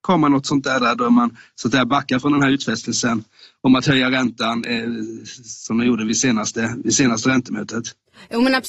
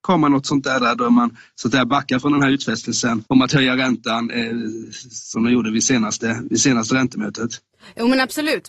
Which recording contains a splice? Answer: second; 1 cut; at 3.3 s

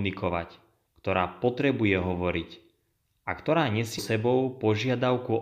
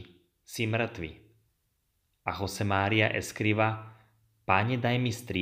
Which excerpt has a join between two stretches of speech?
first; 1 cut; at 4.0 s

